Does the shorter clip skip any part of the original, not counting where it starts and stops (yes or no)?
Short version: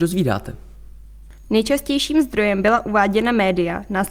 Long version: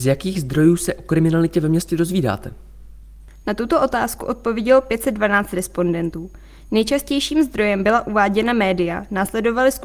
yes